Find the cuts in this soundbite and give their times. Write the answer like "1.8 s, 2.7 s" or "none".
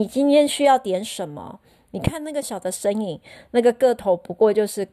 2.4 s